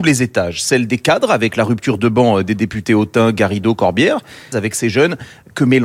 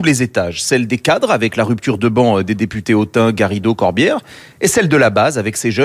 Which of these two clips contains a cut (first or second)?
first